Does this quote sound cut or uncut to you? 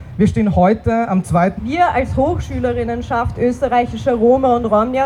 cut